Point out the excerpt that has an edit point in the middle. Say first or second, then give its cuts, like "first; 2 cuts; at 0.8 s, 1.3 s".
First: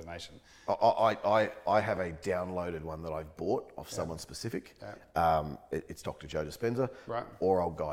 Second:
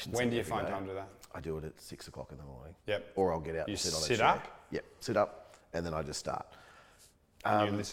second; 1 cut; at 2.8 s